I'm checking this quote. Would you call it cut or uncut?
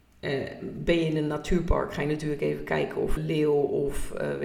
cut